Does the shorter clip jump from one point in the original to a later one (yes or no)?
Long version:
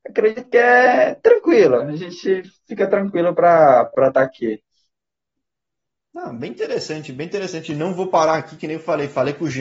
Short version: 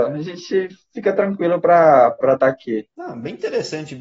yes